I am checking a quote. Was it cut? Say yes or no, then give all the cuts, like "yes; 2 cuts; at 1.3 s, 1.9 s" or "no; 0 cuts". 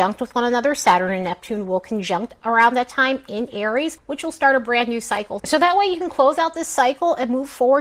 yes; 1 cut; at 5.4 s